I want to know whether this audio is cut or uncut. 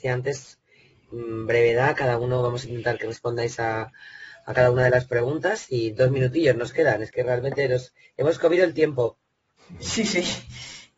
uncut